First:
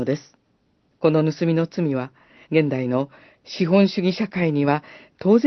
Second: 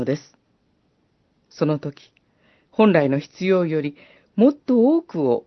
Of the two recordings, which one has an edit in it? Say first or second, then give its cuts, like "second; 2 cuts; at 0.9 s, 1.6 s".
first; 2 cuts; at 0.9 s, 2.4 s